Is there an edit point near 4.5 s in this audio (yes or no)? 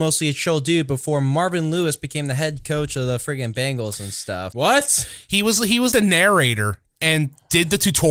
yes